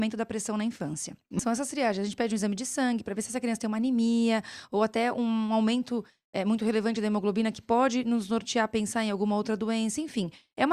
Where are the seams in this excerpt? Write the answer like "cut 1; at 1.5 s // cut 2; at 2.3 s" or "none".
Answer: cut 1; at 1.4 s